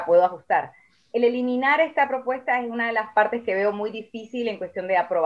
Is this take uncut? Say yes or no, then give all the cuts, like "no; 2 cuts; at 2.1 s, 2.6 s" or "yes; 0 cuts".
yes; 0 cuts